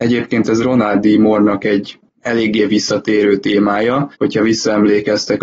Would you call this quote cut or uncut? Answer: cut